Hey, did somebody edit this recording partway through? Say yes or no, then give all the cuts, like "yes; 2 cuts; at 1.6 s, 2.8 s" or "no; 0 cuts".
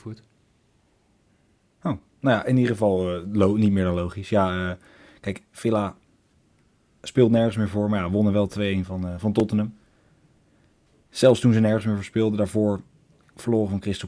no; 0 cuts